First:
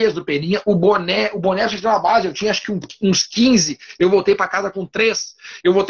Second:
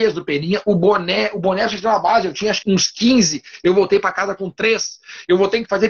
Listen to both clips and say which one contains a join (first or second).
second